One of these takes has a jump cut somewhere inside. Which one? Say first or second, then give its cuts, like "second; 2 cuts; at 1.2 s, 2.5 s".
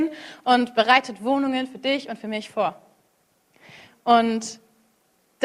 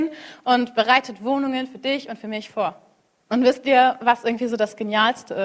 second; 1 cut; at 3.3 s